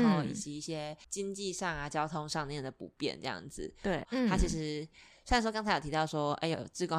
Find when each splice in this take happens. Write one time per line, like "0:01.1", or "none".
0:01.0
0:04.0

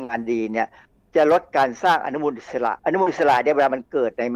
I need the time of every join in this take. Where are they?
0:02.8

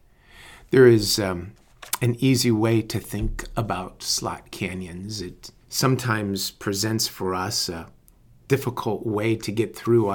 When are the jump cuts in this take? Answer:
0:05.6

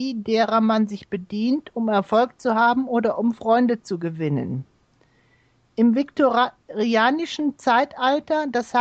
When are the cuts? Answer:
none

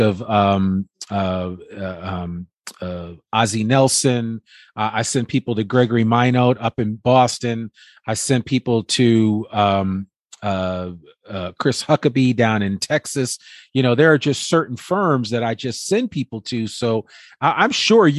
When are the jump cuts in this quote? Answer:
none

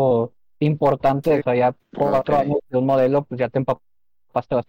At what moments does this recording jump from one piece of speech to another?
0:01.4
0:02.6

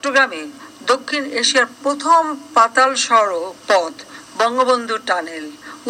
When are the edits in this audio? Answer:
0:03.6

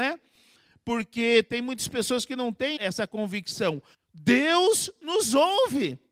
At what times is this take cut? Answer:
0:02.8
0:03.9

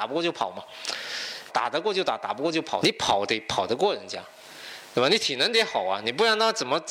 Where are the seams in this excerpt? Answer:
0:01.5
0:02.8

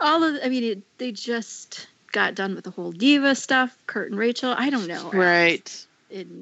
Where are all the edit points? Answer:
0:05.1

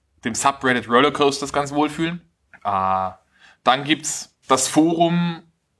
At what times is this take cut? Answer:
0:02.5
0:04.4

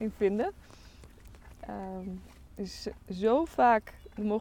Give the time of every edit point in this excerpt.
none

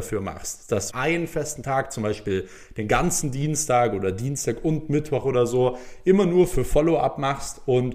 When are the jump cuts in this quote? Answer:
0:00.9

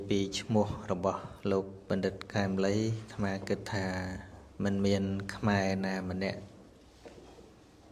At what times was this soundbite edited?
0:04.5

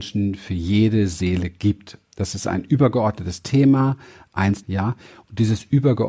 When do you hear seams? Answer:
0:04.6

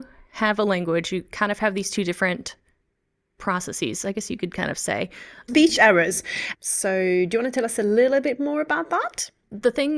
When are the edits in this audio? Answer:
0:05.5
0:06.5

